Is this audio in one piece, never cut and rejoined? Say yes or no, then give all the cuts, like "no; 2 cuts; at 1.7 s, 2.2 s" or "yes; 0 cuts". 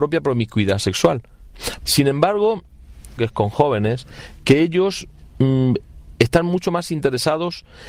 no; 2 cuts; at 1.8 s, 3.2 s